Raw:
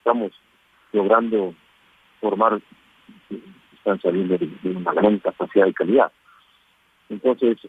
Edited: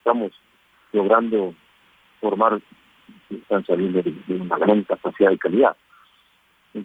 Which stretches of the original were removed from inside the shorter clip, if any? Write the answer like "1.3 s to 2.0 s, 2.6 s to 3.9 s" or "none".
3.4 s to 3.8 s